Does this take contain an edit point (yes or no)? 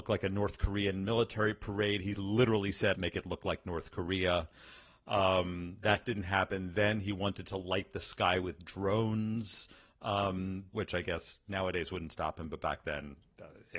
yes